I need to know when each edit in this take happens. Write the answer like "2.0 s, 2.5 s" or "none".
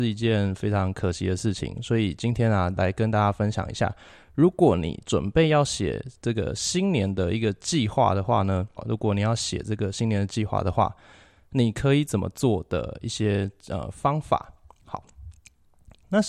8.8 s